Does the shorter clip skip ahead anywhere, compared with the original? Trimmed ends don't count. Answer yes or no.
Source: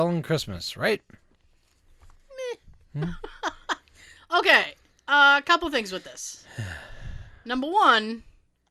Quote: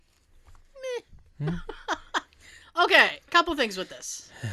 yes